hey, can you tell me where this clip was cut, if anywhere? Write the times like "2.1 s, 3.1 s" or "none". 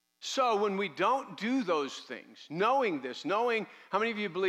none